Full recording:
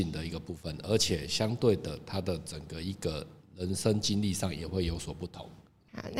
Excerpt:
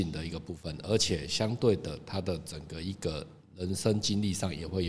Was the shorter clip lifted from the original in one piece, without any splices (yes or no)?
yes